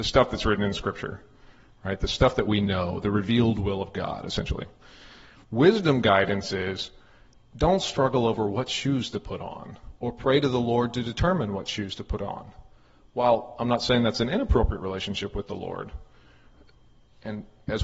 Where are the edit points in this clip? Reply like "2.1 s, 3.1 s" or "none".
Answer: none